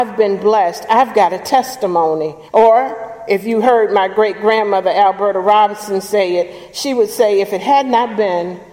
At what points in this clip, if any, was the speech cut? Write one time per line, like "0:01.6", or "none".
0:02.5